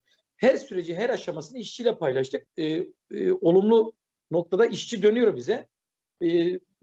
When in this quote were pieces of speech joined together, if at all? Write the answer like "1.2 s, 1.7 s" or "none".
2.5 s